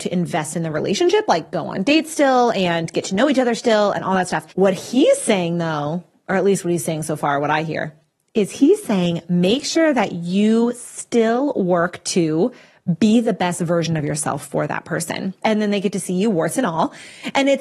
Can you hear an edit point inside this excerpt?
yes; 2 cuts; at 4.5 s, 15.4 s

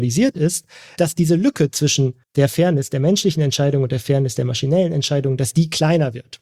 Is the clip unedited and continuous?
no; 2 cuts; at 1.0 s, 2.2 s

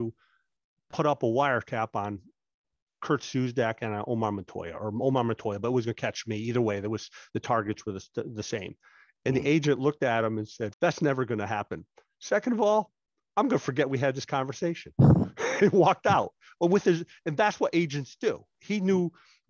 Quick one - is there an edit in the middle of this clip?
yes; 1 cut; at 10.7 s

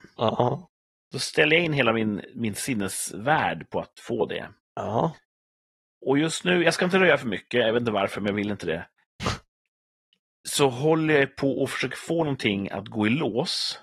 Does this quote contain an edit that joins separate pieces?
no; 0 cuts

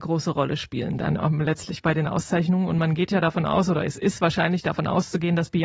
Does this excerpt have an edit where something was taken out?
no; 0 cuts

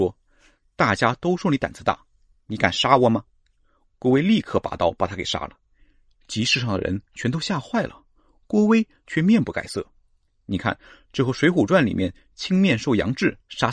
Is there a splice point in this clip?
no; 0 cuts

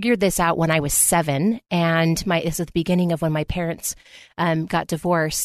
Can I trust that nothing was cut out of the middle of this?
yes; 0 cuts

